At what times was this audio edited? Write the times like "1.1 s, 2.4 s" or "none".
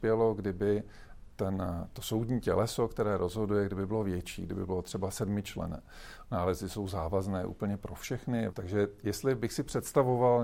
6.2 s, 8.5 s